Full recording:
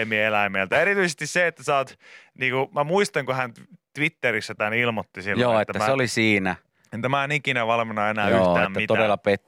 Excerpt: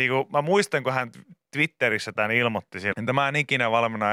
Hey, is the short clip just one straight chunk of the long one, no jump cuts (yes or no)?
no